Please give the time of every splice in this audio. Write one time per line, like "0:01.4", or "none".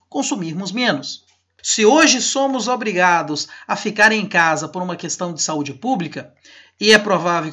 none